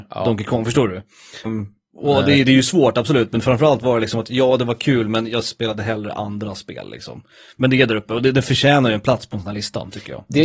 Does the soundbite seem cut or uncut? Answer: cut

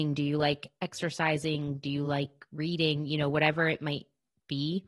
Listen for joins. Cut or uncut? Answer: uncut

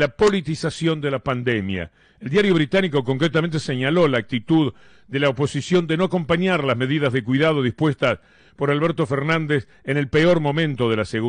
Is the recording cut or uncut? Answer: uncut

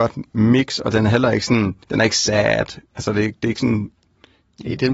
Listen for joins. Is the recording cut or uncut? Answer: cut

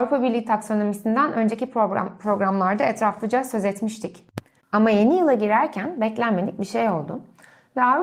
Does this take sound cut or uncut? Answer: cut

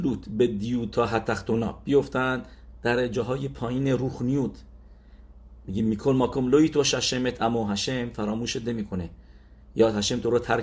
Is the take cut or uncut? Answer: uncut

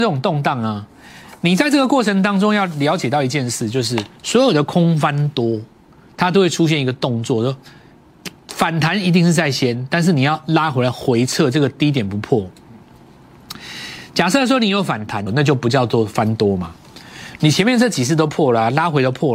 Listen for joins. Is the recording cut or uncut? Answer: cut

